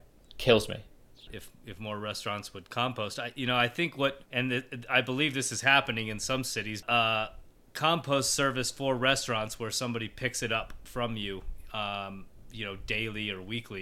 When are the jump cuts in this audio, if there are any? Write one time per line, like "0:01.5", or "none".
0:01.3
0:04.3
0:06.8